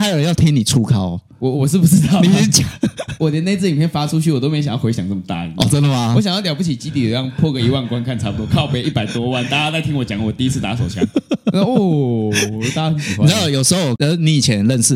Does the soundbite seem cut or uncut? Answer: uncut